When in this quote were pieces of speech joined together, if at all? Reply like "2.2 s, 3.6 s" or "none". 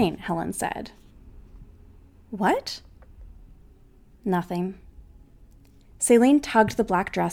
none